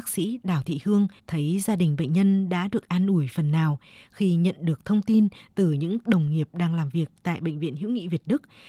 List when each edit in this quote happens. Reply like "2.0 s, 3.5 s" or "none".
1.2 s